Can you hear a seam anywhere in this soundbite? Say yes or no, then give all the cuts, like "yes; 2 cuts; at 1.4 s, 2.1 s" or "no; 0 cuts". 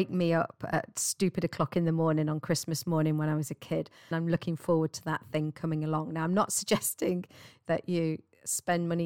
yes; 1 cut; at 4.1 s